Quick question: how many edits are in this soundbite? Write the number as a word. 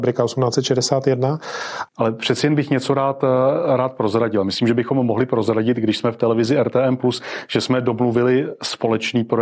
one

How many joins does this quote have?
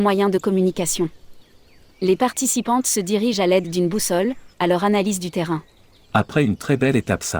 two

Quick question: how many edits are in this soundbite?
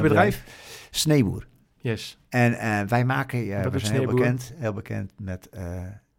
zero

